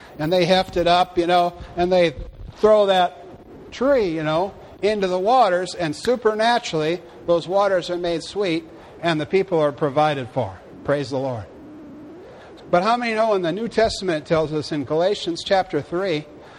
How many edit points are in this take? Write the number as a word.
one